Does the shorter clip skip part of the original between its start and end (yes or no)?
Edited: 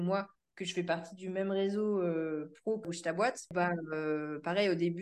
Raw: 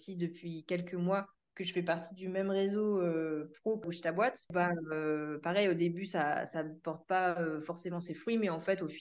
no